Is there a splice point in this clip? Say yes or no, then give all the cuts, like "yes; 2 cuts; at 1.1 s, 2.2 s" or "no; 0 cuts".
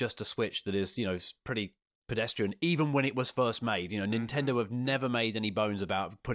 no; 0 cuts